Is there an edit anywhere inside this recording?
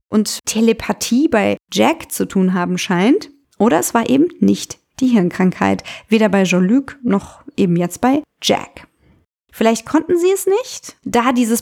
yes; 2 cuts; at 3.4 s, 9.4 s

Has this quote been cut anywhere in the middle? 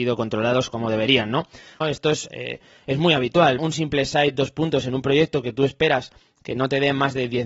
yes; 2 cuts; at 1.8 s, 3.6 s

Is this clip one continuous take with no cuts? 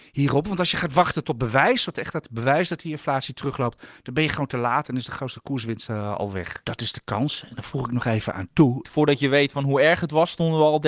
no; 2 cuts; at 6.6 s, 8.8 s

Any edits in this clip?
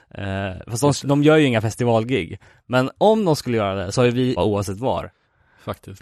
yes; 1 cut; at 4.4 s

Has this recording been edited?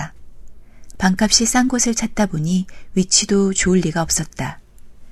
yes; 1 cut; at 0.9 s

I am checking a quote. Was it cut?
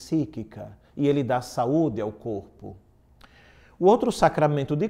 no; 0 cuts

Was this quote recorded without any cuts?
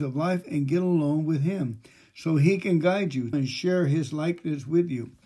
no; 1 cut; at 3.3 s

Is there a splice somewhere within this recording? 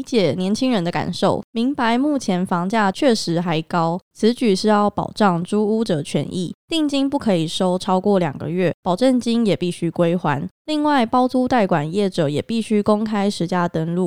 yes; 1 cut; at 4.1 s

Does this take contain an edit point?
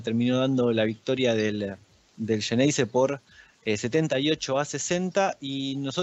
no; 0 cuts

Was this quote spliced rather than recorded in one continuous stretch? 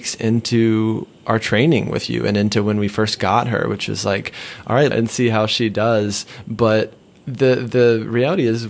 yes; 1 cut; at 4.9 s

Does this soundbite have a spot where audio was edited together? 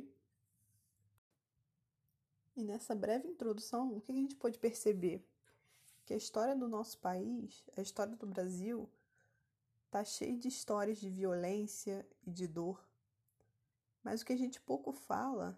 no; 0 cuts

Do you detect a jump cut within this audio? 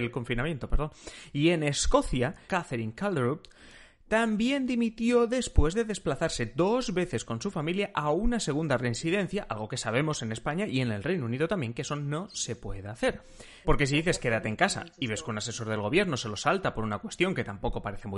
yes; 2 cuts; at 2.5 s, 13.6 s

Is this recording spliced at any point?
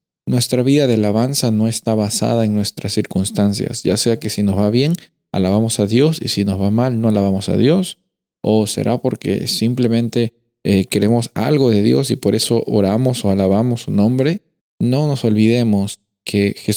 yes; 1 cut; at 14.6 s

